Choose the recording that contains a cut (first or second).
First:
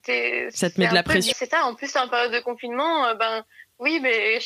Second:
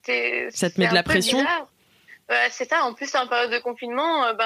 first